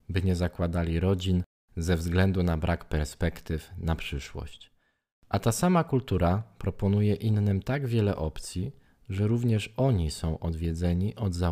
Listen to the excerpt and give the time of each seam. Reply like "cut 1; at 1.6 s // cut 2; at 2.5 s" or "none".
none